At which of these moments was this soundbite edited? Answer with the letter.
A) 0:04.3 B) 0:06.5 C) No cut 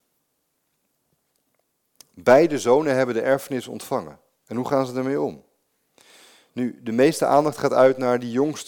C